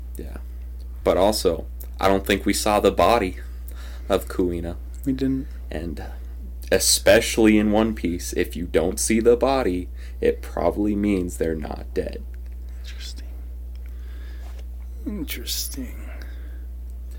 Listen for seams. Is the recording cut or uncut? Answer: uncut